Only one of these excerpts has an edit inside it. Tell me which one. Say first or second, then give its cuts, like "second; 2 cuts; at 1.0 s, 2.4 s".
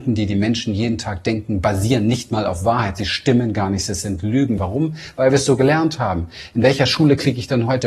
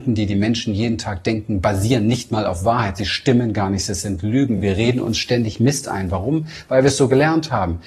first; 1 cut; at 4.6 s